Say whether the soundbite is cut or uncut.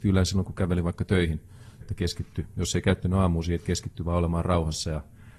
cut